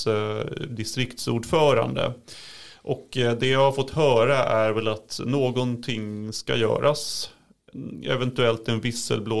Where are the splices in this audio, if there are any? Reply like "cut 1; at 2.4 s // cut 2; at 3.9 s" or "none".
none